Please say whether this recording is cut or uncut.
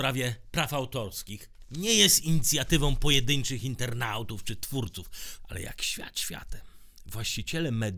cut